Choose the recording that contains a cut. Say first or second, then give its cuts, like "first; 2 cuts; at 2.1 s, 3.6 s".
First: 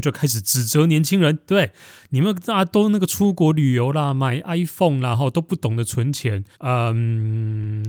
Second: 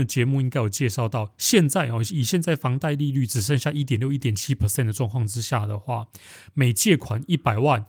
first; 1 cut; at 6.5 s